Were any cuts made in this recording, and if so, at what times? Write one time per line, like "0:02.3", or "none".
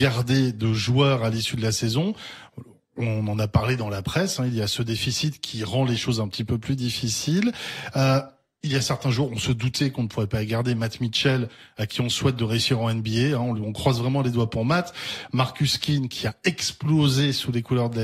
none